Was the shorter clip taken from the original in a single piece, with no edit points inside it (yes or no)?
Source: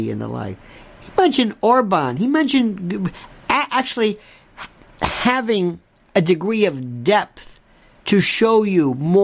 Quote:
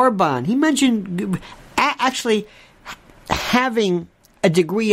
yes